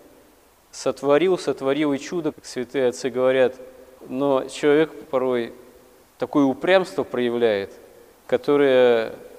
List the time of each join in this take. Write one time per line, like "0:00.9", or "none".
0:02.3
0:04.0